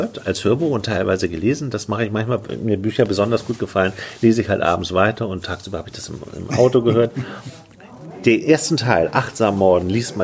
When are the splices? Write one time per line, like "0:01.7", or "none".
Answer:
none